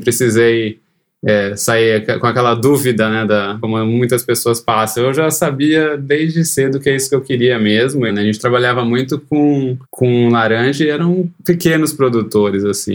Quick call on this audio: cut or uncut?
cut